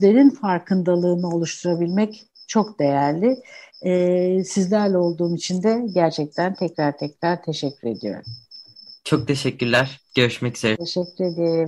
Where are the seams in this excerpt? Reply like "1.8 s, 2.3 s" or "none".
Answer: none